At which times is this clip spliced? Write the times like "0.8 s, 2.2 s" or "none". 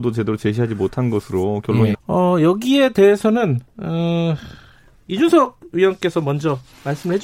1.9 s

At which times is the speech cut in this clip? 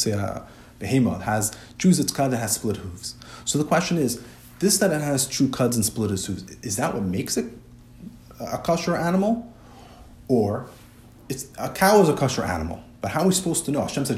none

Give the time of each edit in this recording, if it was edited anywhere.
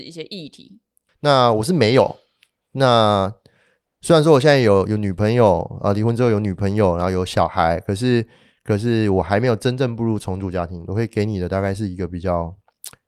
1.1 s

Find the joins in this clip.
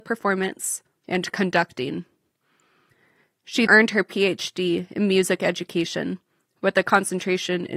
1.0 s, 3.7 s

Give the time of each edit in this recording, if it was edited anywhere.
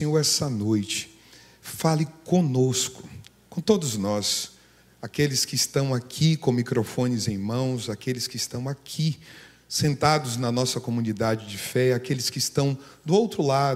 none

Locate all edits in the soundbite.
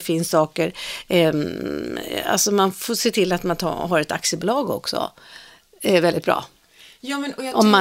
none

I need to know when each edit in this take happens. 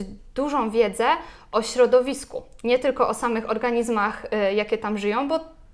none

